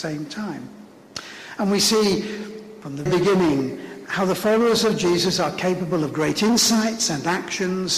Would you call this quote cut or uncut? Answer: cut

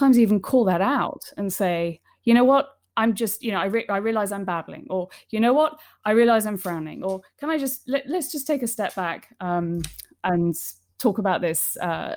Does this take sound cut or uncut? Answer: uncut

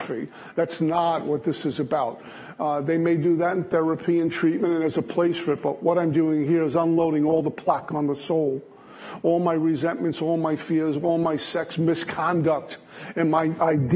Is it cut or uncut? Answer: uncut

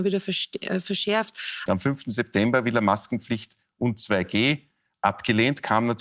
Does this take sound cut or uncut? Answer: cut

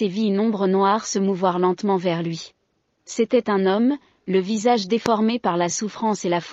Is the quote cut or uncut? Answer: cut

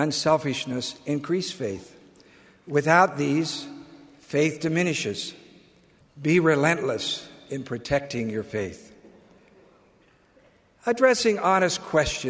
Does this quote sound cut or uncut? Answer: cut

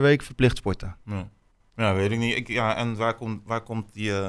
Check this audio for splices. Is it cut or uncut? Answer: uncut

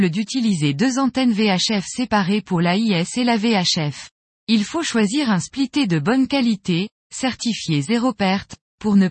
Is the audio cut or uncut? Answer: cut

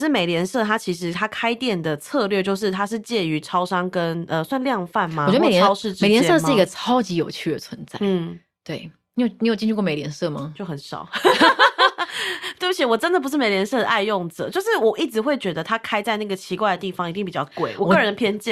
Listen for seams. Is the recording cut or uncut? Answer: uncut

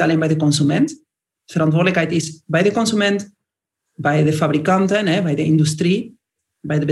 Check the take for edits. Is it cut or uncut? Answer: uncut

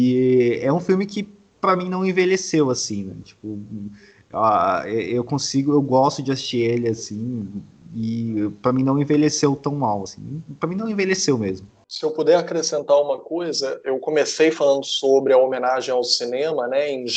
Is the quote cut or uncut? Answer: uncut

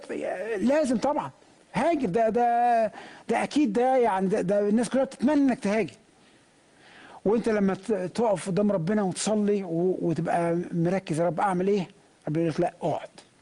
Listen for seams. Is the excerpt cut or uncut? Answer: uncut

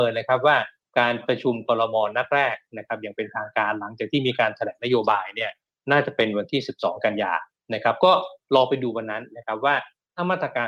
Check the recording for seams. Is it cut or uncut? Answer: uncut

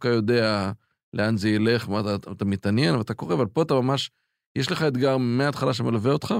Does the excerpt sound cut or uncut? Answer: uncut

